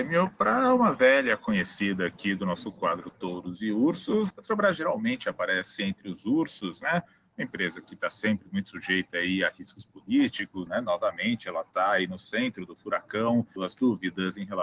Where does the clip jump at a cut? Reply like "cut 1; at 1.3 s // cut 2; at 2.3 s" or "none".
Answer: cut 1; at 4.3 s // cut 2; at 10.7 s // cut 3; at 13.6 s